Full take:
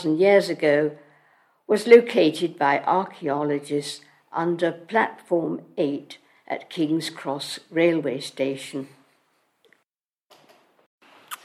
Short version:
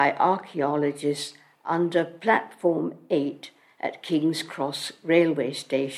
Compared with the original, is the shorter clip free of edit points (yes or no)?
yes